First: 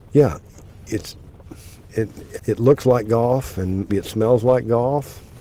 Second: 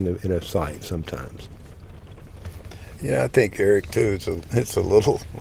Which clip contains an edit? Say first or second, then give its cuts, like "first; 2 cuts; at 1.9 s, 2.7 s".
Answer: first; 2 cuts; at 2.4 s, 3.9 s